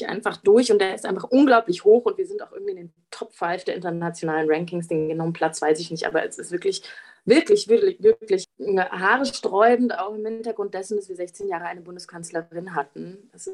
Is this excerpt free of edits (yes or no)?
yes